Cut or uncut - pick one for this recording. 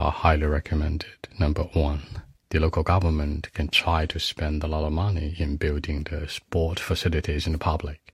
uncut